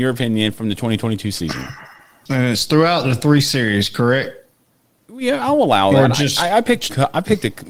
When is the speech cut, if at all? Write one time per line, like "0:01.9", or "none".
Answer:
none